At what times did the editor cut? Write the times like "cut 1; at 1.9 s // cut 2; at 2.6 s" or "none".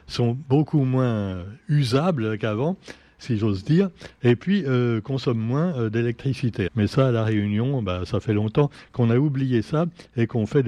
cut 1; at 6.7 s